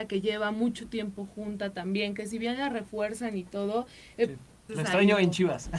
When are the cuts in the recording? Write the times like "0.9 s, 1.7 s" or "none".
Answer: 4.7 s